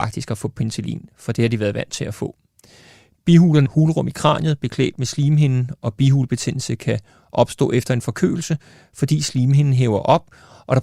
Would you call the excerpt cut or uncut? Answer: cut